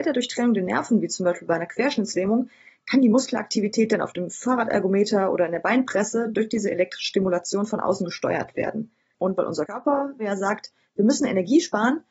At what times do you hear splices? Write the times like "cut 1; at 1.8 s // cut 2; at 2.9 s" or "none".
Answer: cut 1; at 9.1 s